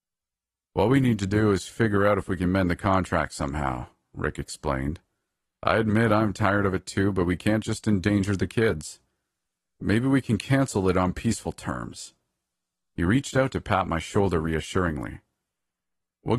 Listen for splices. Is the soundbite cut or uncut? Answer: uncut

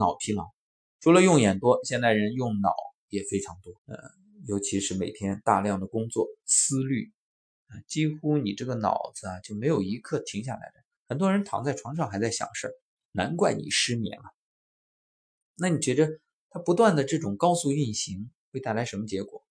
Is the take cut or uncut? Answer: cut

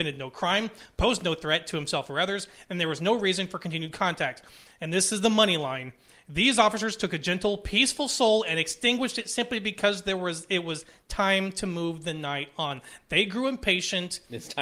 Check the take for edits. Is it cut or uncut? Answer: uncut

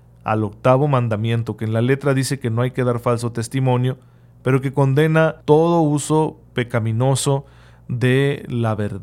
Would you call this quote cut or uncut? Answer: cut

